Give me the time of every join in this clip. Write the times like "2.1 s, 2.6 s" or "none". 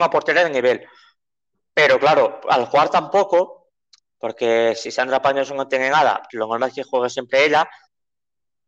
6.3 s